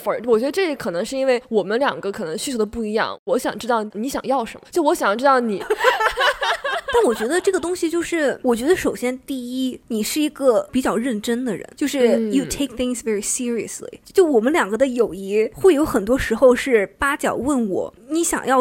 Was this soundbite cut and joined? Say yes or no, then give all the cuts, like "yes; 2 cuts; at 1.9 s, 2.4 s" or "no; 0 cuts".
yes; 1 cut; at 5.6 s